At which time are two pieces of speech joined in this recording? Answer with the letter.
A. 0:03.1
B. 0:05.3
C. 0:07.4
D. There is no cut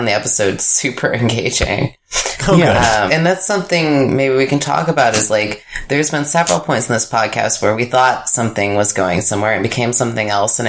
A